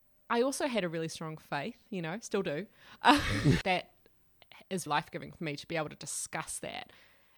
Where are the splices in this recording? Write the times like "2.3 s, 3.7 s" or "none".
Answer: 3.6 s, 4.9 s